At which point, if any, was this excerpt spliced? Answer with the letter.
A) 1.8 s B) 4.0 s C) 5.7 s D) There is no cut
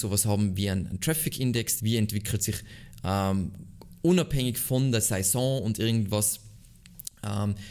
A